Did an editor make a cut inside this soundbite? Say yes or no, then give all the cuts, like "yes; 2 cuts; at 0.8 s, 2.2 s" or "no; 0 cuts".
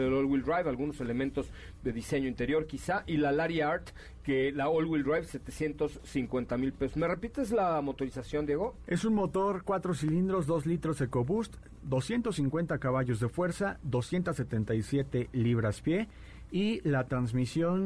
no; 0 cuts